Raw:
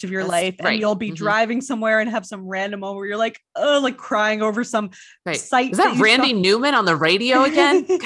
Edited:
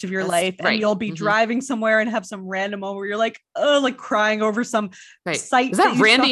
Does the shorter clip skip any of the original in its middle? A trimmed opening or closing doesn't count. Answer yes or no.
no